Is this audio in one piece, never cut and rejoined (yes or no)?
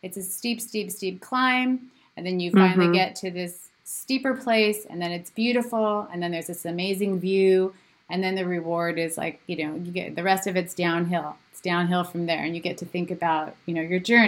yes